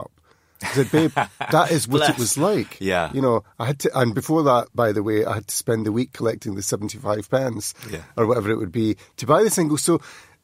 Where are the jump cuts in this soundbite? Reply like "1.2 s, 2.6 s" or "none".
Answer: none